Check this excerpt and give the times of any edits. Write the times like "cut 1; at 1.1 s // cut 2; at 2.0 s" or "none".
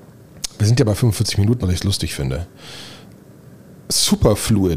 cut 1; at 1.6 s